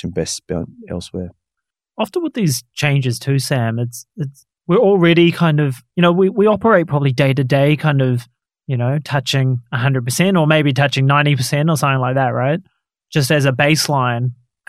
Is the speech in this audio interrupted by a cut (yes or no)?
no